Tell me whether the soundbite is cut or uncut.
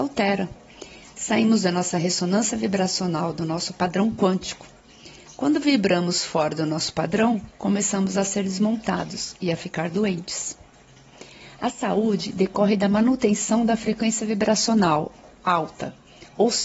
cut